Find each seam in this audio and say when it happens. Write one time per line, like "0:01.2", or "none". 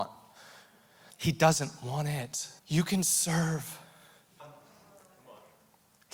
0:01.1
0:02.6
0:04.4